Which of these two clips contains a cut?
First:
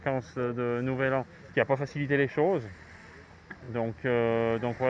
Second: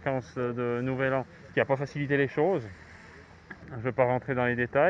second; 1 cut; at 3.6 s

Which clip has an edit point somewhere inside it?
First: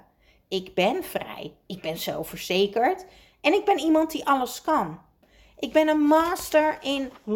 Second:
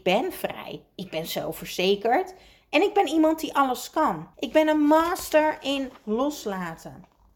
second; 1 cut; at 4.3 s

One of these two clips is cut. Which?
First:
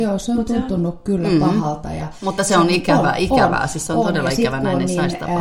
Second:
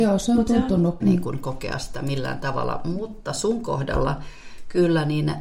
second; 1 cut; at 1.0 s

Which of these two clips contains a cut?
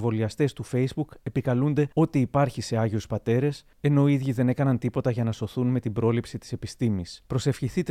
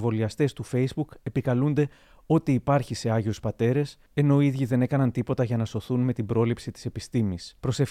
first; 1 cut; at 1.9 s

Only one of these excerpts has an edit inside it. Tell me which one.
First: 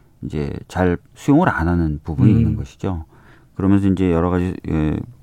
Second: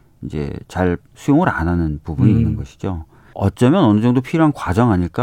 second; 1 cut; at 3.3 s

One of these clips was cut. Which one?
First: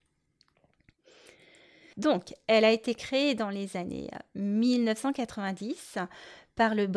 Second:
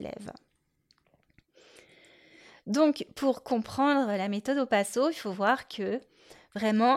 first; 1 cut; at 1.9 s

